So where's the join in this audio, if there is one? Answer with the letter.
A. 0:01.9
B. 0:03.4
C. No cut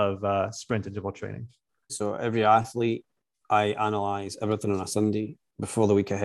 A